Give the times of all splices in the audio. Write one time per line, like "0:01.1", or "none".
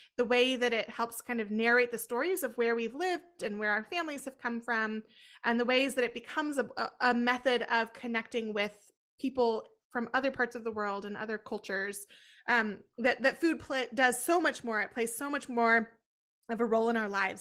none